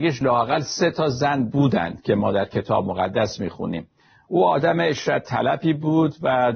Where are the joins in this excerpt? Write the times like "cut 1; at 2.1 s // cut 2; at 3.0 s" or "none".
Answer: none